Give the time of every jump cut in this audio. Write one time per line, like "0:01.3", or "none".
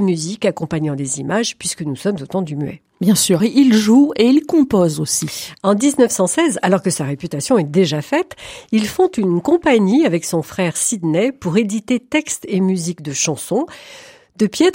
0:03.4